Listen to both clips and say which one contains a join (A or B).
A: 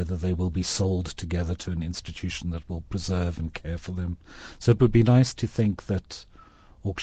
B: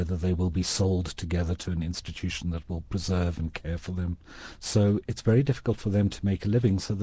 B